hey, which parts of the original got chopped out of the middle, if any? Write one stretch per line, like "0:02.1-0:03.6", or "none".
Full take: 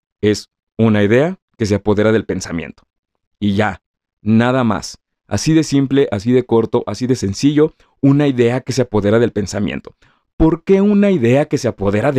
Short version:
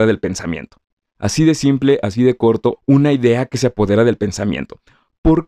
0:03.1-0:05.1
0:06.8-0:07.9